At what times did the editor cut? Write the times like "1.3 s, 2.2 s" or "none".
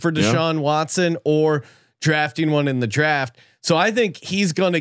none